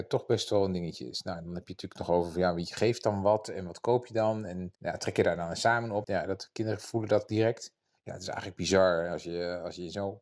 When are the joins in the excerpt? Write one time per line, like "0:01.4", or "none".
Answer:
0:04.8
0:06.0
0:08.0